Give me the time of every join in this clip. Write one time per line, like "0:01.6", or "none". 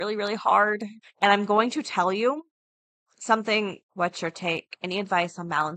0:01.0
0:03.8